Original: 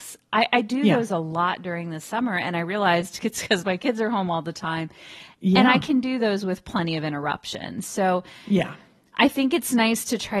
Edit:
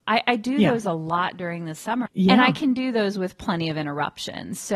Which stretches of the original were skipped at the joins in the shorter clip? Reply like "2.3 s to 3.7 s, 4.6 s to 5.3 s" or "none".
2.3 s to 5.3 s